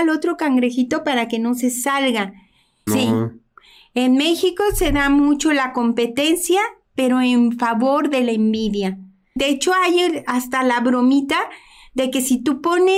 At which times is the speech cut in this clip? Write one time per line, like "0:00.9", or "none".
0:02.9
0:09.4